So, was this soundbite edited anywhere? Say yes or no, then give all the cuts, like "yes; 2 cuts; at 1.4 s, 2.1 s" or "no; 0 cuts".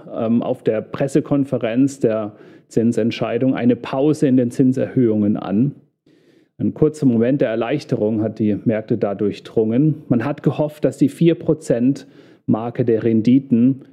no; 0 cuts